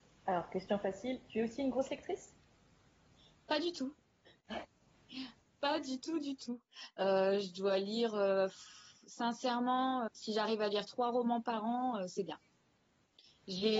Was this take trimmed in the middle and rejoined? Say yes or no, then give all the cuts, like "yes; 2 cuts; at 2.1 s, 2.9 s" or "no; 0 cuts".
yes; 1 cut; at 10.1 s